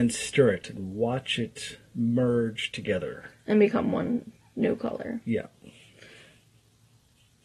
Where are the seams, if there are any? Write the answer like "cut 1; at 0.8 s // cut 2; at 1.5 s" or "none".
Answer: none

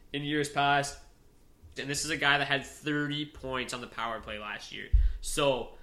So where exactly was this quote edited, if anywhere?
cut 1; at 1.8 s

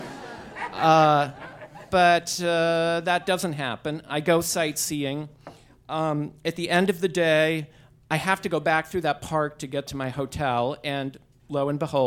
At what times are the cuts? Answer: none

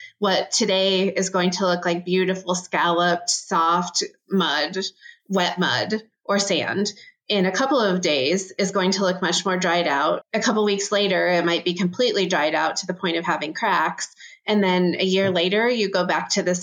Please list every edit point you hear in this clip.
cut 1; at 10.2 s

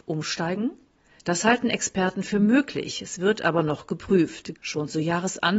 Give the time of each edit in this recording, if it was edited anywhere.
cut 1; at 4.6 s

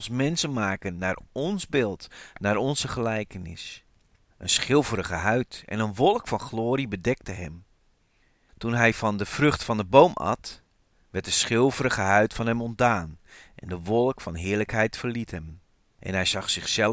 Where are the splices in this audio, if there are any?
cut 1; at 4.3 s

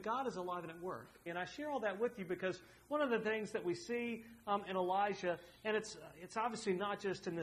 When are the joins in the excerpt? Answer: cut 1; at 1.3 s

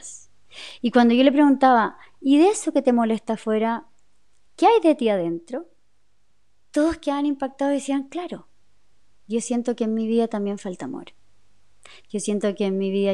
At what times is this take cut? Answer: none

